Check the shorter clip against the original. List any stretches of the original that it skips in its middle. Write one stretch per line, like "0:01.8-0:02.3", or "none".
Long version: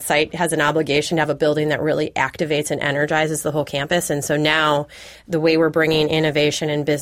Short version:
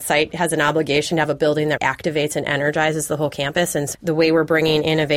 0:01.8-0:02.1
0:04.3-0:05.2